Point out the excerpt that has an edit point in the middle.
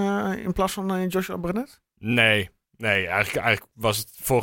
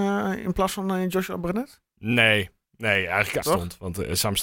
second; 1 cut; at 3.4 s

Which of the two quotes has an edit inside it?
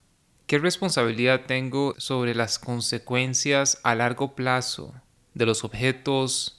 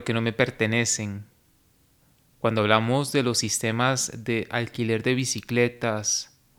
first; 1 cut; at 1.9 s

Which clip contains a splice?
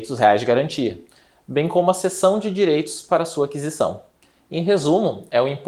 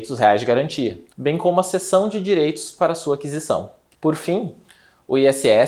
second; 2 cuts; at 1.1 s, 3.9 s

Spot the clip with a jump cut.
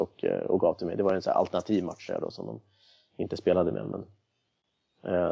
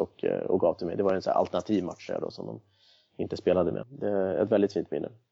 second; 1 cut; at 3.8 s

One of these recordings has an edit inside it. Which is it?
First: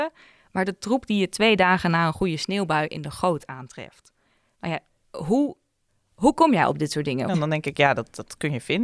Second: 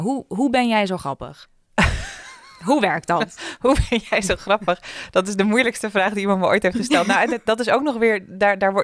first; 1 cut; at 7.3 s

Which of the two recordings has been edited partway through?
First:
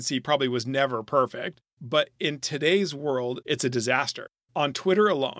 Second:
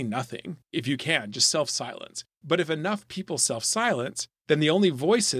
first; 1 cut; at 3.4 s

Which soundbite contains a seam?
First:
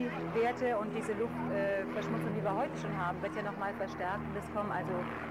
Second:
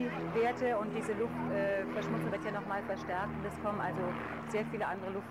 second; 1 cut; at 2.3 s

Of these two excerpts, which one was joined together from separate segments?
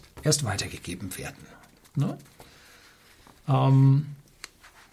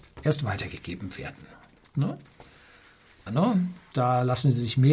second; 1 cut; at 3.3 s

